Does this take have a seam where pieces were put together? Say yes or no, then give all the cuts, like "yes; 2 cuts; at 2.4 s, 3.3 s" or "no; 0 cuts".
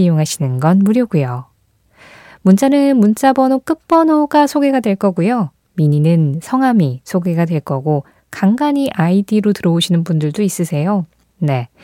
no; 0 cuts